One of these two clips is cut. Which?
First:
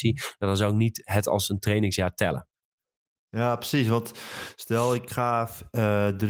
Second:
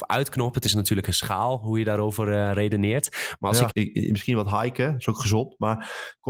second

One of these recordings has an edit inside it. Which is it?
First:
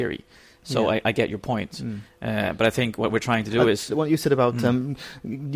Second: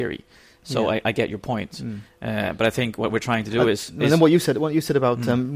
first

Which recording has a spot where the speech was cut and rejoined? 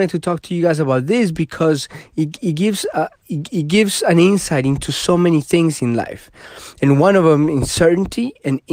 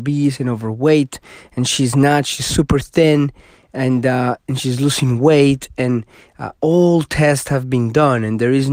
first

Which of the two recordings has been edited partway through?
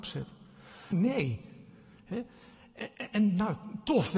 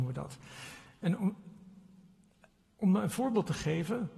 first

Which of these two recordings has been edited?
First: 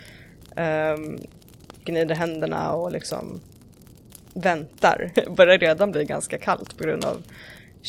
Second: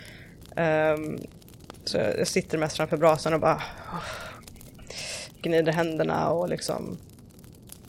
first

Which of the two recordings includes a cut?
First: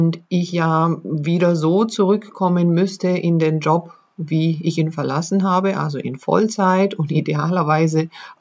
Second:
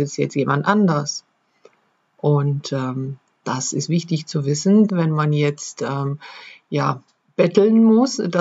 second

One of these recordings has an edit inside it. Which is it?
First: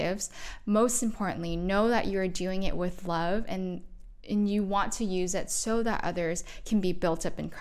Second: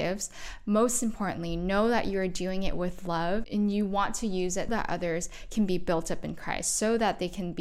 second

